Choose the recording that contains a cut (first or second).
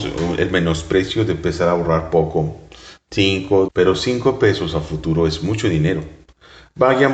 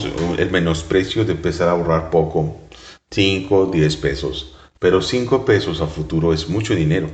first